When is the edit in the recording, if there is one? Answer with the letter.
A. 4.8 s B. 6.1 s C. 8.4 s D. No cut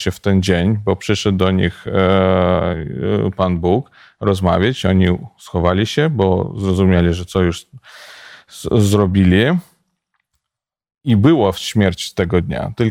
D